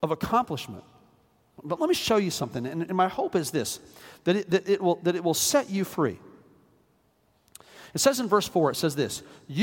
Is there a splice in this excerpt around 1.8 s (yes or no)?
yes